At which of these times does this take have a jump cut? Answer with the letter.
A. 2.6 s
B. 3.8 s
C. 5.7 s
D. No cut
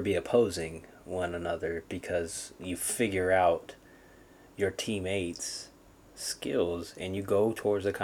A